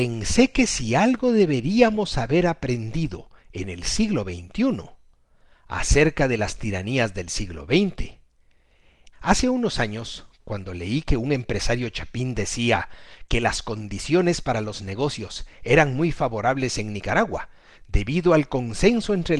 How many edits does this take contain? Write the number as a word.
one